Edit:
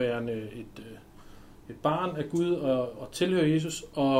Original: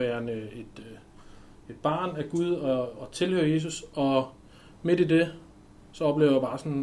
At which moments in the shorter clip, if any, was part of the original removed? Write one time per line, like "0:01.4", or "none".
none